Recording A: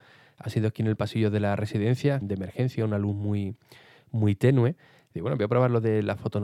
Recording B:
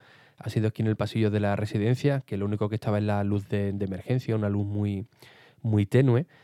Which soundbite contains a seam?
A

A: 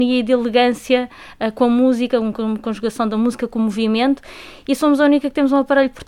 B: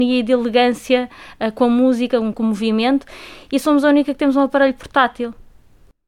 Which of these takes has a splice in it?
B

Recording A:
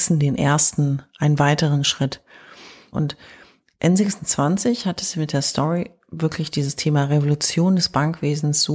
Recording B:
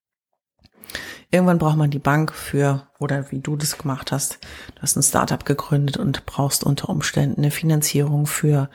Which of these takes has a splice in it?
A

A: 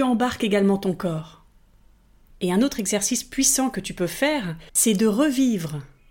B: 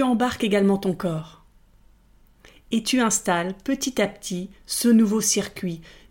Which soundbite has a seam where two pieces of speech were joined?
A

